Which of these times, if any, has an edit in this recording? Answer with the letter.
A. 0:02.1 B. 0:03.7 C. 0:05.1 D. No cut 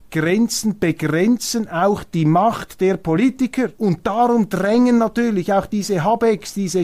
B